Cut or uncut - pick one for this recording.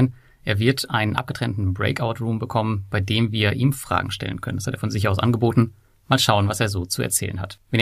uncut